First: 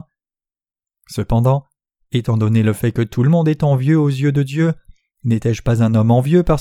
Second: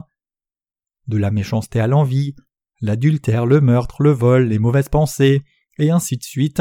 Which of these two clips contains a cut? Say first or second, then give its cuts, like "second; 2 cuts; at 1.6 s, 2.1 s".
second; 1 cut; at 0.9 s